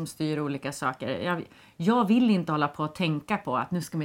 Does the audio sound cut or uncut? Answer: uncut